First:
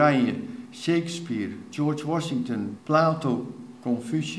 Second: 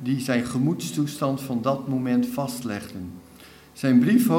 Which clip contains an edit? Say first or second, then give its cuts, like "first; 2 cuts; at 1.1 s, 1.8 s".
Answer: first; 1 cut; at 2.8 s